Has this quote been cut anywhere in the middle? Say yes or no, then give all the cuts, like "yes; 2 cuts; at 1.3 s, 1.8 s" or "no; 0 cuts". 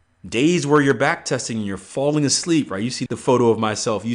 yes; 1 cut; at 3.1 s